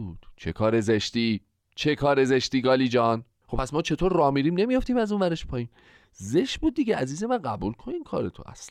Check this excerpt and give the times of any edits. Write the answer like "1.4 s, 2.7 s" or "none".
3.4 s